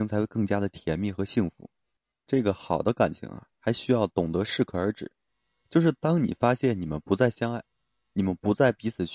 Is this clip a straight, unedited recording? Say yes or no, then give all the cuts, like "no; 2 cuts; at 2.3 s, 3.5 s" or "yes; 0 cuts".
no; 1 cut; at 2.3 s